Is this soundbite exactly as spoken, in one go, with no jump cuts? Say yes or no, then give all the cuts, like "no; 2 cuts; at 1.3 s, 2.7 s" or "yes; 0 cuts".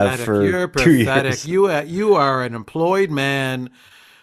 yes; 0 cuts